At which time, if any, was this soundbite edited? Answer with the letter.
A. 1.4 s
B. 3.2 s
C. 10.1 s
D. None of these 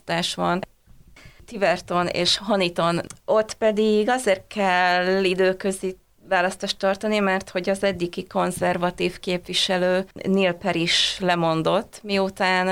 C